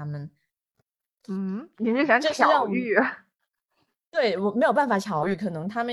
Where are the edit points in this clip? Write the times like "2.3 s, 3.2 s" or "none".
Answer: none